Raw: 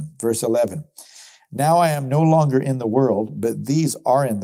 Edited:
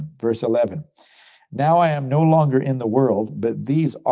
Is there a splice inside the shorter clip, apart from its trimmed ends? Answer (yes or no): no